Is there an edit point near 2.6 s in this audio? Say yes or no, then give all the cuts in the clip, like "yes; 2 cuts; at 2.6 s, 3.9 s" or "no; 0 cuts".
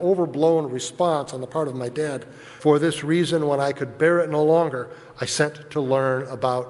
yes; 1 cut; at 2.6 s